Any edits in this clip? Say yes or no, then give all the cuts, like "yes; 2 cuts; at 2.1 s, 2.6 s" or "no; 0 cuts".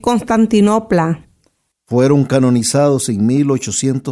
yes; 1 cut; at 1.7 s